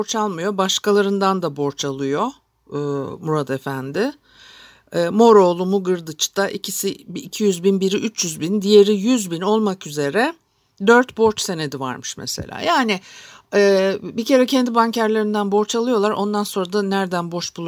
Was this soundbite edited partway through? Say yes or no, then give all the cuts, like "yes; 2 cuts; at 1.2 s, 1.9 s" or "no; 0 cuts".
no; 0 cuts